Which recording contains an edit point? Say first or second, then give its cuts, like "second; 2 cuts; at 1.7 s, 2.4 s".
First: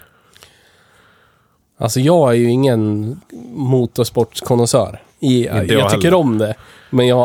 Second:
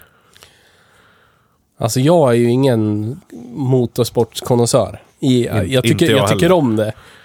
first; 1 cut; at 5.7 s